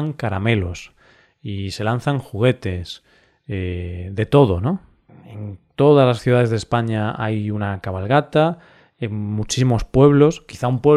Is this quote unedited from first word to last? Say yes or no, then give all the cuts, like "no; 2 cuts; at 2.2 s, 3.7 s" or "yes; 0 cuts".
no; 1 cut; at 5.1 s